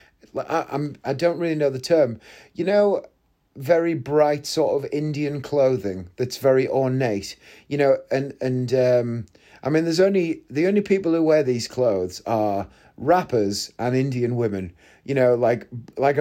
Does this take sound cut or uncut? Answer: uncut